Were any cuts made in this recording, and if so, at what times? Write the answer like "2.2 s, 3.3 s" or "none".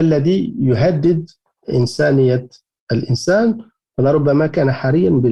none